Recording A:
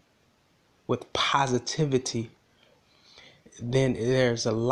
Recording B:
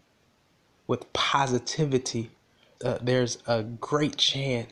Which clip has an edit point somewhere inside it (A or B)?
B